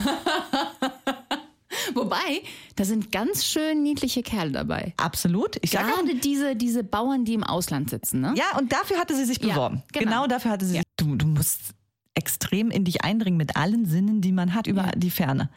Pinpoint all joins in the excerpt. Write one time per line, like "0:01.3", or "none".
0:10.8
0:14.6